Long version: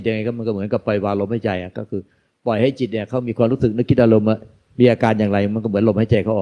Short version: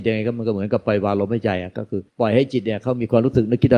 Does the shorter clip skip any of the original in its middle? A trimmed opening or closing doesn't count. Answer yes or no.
yes